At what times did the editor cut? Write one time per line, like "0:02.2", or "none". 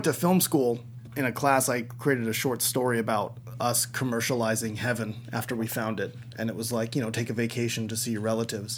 0:01.1